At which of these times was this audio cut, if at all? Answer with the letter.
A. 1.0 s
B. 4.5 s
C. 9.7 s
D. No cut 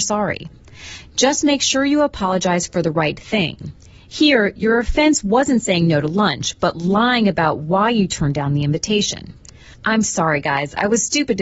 C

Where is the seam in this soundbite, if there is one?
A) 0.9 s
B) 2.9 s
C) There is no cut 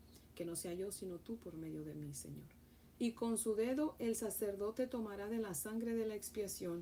B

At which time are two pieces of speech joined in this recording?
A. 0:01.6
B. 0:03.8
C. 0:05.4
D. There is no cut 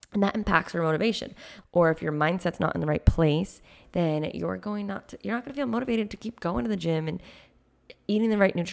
A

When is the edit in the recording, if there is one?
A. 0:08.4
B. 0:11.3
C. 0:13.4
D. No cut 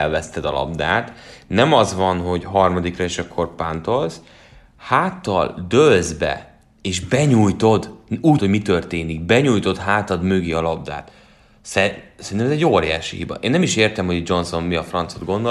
A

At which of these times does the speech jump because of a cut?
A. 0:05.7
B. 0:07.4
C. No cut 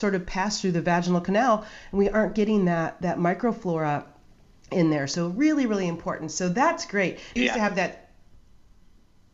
B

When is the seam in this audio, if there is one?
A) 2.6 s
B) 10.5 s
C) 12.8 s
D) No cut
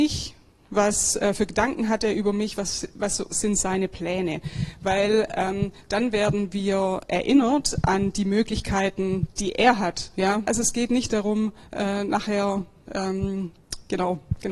B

